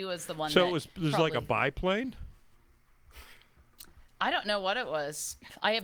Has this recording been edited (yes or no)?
no